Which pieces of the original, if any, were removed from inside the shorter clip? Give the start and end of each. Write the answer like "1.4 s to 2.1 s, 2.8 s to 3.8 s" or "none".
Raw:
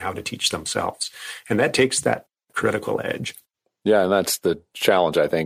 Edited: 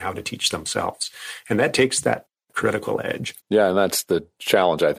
3.4 s to 3.7 s